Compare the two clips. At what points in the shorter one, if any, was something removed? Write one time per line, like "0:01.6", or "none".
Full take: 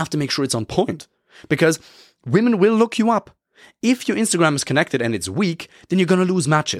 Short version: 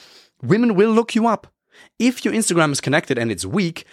none

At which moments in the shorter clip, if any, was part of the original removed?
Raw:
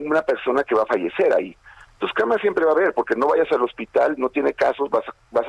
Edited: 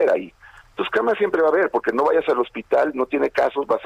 none

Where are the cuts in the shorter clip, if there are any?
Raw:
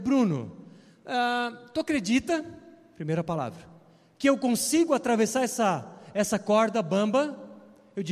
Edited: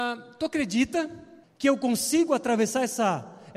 0:01.4

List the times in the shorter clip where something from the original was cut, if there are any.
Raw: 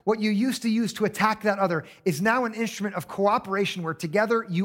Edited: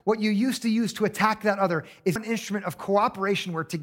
0:02.2

